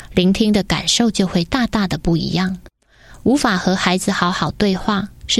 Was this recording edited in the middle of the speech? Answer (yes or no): no